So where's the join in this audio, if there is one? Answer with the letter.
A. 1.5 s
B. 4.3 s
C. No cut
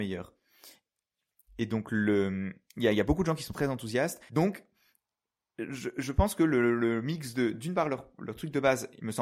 B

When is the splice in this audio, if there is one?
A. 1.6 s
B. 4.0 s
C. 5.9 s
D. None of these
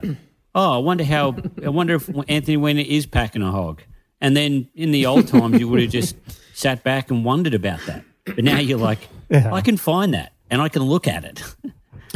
D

